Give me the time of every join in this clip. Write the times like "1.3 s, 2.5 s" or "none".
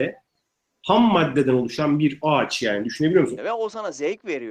3.4 s